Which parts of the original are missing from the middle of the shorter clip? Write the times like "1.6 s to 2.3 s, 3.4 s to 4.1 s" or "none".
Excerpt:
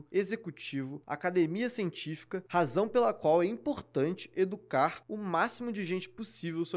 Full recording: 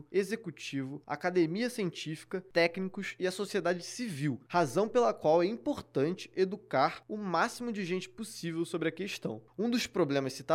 2.5 s to 4.5 s